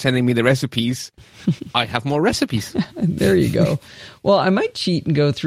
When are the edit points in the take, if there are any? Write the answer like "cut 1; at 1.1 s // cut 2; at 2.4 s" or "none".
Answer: none